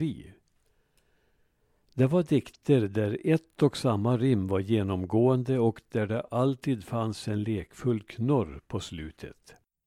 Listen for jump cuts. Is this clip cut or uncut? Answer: uncut